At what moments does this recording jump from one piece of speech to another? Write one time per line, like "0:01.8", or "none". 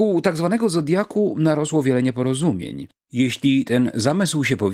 0:03.0